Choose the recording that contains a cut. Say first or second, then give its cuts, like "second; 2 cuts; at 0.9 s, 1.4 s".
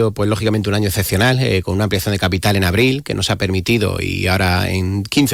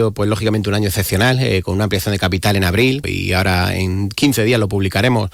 second; 1 cut; at 3.0 s